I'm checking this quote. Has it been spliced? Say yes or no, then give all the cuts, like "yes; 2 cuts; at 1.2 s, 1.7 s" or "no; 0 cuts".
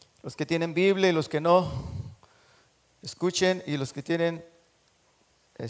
no; 0 cuts